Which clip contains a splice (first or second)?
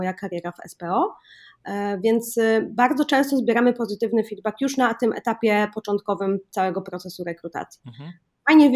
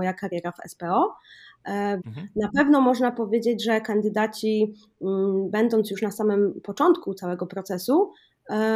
second